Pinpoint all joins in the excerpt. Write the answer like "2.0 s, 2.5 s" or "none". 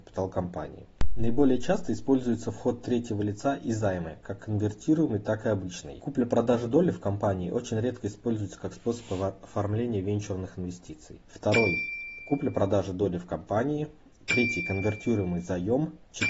11.2 s

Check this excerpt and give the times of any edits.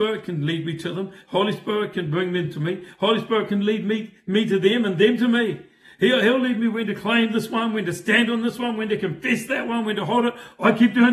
none

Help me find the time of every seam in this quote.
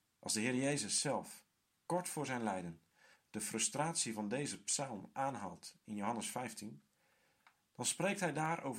none

